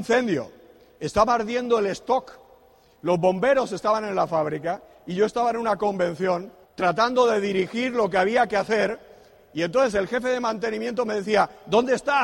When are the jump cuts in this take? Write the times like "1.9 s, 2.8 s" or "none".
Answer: 6.6 s

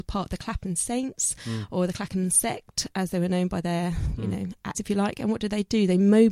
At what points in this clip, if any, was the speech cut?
4.7 s

